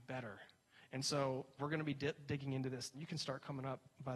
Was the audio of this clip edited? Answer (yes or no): yes